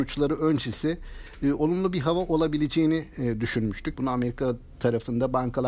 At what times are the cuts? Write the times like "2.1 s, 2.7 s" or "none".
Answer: 3.9 s